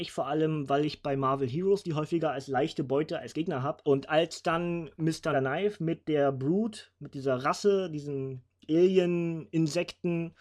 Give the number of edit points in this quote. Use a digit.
2